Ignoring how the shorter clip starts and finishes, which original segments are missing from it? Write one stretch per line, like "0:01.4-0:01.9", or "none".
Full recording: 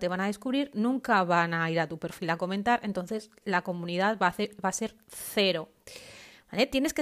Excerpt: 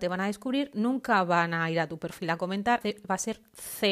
0:02.8-0:04.3